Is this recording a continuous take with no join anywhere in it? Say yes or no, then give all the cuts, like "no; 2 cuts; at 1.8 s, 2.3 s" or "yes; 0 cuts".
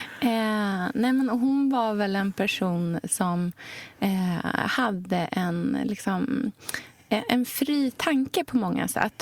yes; 0 cuts